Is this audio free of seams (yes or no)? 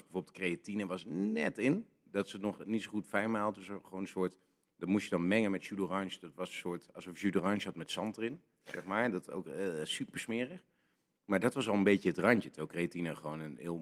yes